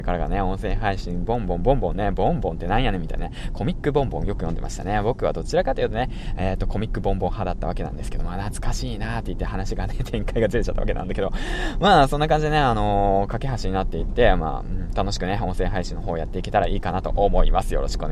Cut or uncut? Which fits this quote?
uncut